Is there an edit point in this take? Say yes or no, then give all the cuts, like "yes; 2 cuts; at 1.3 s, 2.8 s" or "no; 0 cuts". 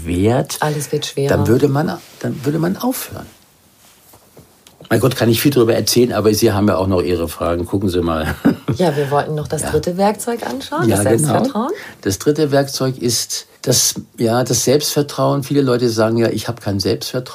yes; 1 cut; at 13.6 s